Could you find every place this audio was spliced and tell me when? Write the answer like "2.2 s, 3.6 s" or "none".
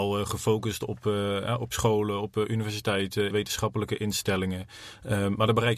3.3 s